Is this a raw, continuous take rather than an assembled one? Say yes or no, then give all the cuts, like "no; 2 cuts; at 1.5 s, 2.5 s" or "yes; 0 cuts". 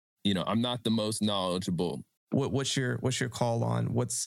no; 1 cut; at 2.2 s